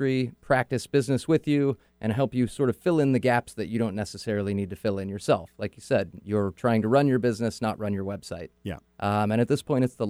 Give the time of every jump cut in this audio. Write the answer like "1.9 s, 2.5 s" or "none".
8.8 s